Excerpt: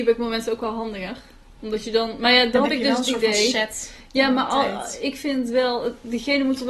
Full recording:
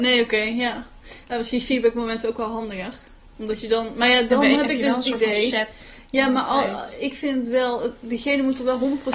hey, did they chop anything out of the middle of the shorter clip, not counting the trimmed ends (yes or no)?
yes